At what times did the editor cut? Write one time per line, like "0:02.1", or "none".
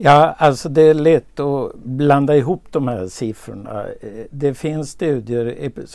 none